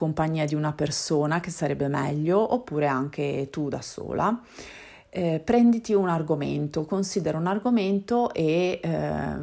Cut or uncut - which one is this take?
uncut